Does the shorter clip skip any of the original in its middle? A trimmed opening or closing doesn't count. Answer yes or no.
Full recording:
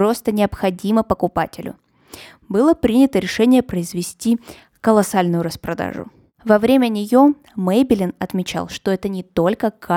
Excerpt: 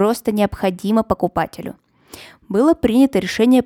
no